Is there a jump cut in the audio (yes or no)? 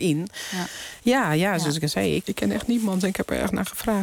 yes